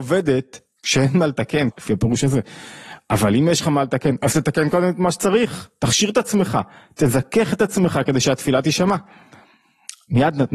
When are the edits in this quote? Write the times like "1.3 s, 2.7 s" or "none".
1.7 s